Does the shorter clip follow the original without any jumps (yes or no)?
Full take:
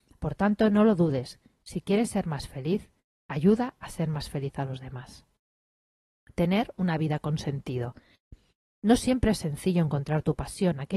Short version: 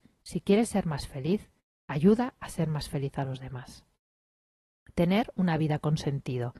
yes